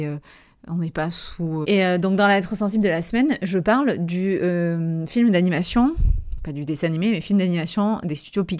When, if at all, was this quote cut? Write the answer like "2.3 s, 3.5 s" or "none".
1.6 s